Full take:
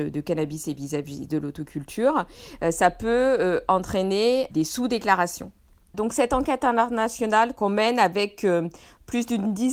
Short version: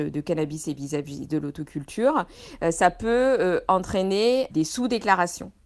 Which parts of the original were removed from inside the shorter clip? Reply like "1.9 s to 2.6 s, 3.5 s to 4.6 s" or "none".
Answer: none